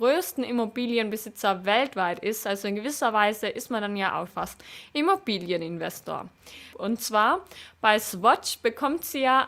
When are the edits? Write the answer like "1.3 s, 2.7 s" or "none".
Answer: 4.3 s, 6.7 s

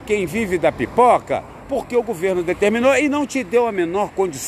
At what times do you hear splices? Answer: 1.6 s

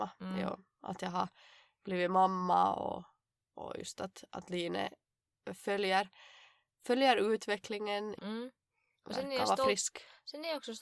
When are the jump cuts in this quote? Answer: 8.2 s

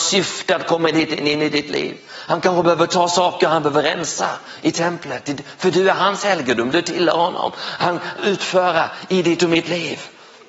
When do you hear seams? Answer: 8.2 s

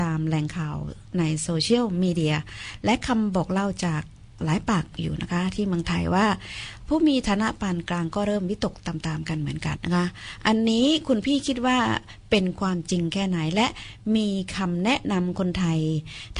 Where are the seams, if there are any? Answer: 9.8 s

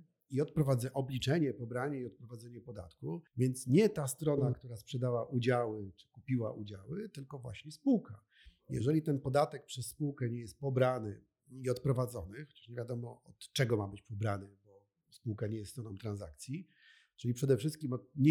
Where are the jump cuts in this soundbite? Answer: 3.3 s

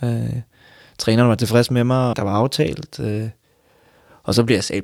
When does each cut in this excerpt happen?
2.1 s

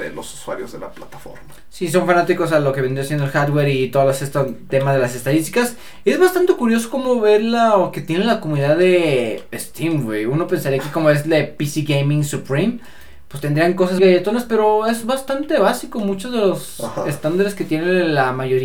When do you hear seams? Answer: 14.0 s

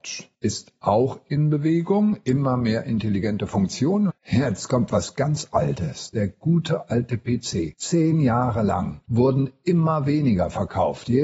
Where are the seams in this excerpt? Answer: 4.1 s

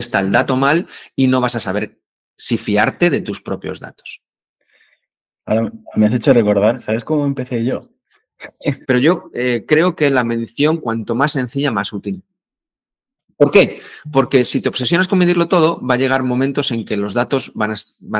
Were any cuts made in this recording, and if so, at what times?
8.8 s

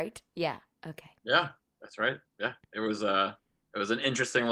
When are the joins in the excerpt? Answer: 1.2 s

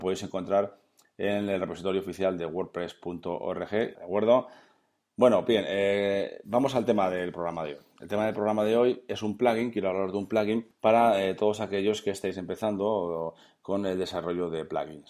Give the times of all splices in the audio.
3.9 s

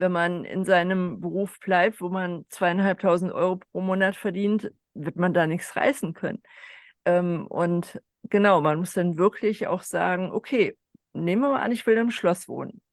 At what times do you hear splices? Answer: none

